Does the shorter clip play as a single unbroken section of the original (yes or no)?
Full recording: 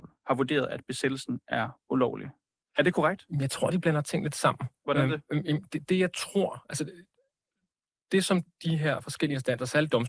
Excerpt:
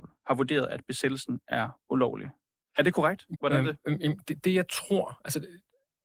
no